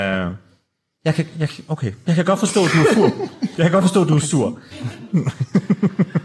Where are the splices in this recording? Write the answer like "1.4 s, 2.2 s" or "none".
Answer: 4.7 s